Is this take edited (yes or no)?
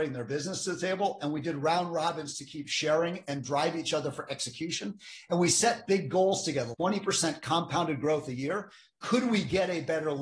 yes